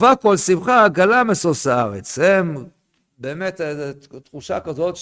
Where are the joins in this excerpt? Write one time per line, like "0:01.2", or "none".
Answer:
none